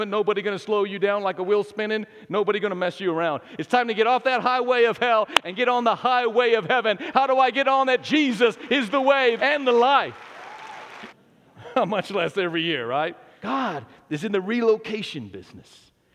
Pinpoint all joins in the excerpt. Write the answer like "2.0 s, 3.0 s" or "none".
9.4 s, 11.1 s, 13.4 s